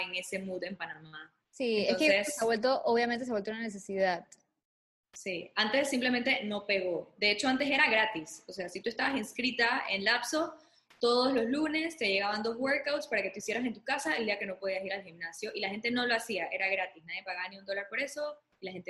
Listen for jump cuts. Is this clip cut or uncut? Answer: uncut